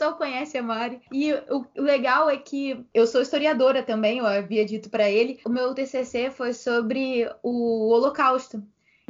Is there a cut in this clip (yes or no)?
no